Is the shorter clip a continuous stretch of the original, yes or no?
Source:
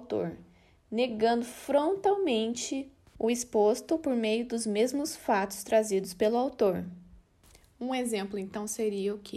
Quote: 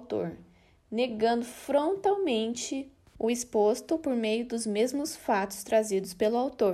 yes